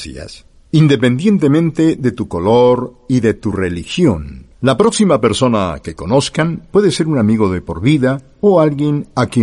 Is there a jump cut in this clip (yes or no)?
yes